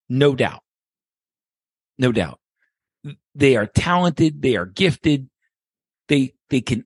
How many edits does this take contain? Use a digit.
0